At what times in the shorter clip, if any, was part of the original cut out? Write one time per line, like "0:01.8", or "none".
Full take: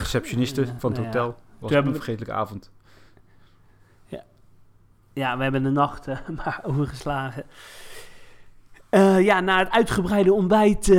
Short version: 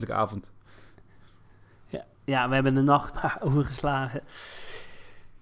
0:02.1
0:03.1